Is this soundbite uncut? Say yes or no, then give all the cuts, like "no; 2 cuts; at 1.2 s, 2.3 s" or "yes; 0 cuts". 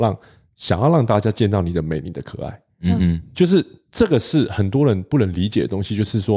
yes; 0 cuts